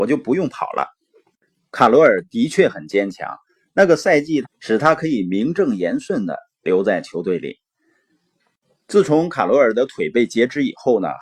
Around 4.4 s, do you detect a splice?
yes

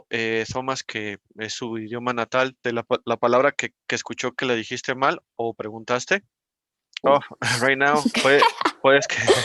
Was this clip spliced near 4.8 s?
no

